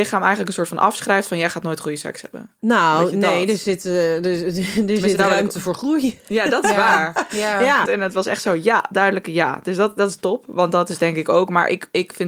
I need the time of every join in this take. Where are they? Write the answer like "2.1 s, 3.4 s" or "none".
7.9 s